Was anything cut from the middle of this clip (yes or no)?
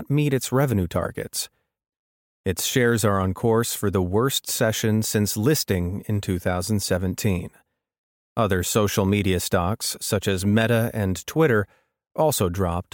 no